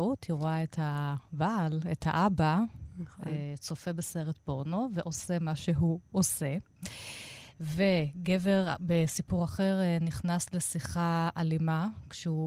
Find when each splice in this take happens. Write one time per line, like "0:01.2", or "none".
none